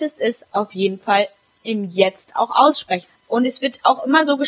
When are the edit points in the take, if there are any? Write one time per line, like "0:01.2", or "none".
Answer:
0:03.1